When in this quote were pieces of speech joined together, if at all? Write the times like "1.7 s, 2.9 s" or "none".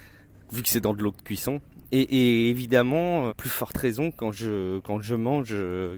3.3 s